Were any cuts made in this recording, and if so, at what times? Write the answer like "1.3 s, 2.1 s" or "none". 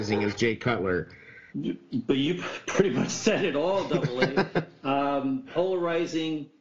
1.5 s, 5.5 s